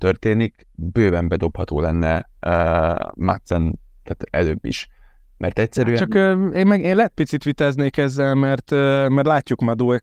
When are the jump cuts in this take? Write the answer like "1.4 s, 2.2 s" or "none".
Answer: none